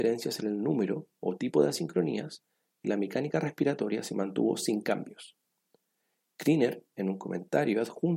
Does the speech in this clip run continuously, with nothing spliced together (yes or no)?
yes